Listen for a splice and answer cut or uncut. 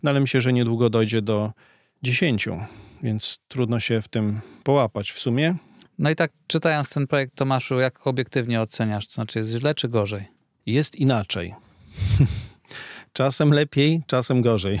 uncut